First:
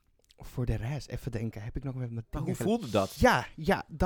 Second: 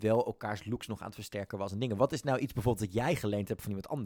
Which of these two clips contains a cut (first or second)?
first